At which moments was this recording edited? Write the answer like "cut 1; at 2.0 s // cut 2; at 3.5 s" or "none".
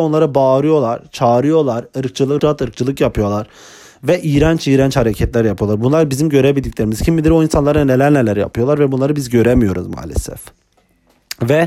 cut 1; at 2.4 s